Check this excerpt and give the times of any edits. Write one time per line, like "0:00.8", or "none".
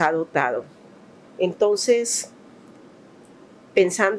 0:01.3